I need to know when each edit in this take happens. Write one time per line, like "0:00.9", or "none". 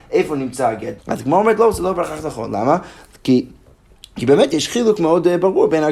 0:01.0